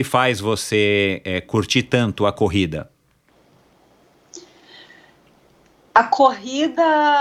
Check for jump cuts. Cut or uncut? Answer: uncut